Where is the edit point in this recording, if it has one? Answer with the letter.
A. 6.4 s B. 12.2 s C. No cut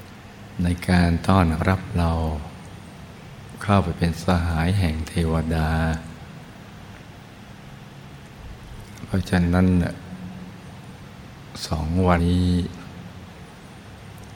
B